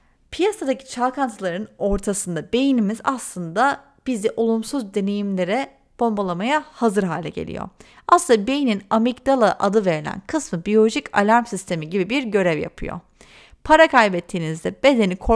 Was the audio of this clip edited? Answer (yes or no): no